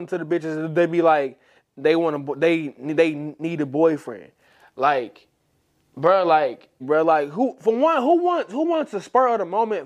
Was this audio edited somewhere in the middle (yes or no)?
yes